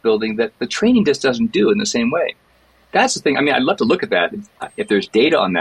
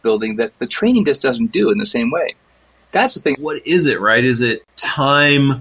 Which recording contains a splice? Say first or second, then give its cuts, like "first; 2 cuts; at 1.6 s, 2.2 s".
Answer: second; 1 cut; at 3.3 s